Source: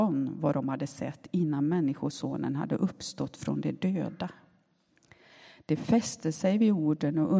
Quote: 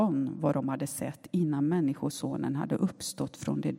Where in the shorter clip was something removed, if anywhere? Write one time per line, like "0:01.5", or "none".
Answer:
none